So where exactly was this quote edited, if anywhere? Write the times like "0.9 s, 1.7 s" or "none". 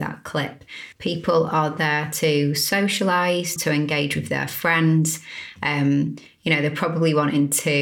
0.9 s, 3.6 s